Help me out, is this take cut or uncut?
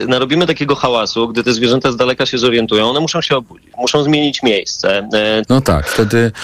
cut